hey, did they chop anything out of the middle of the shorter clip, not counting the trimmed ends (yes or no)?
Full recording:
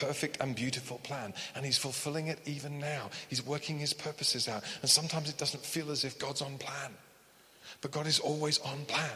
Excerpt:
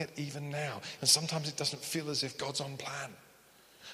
yes